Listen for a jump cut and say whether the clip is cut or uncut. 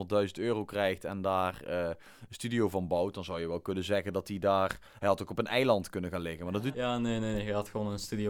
cut